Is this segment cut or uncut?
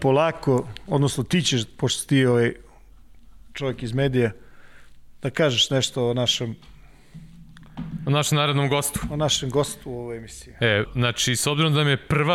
cut